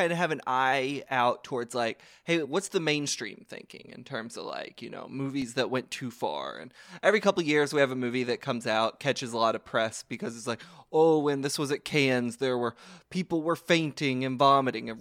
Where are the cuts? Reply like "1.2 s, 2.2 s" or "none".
none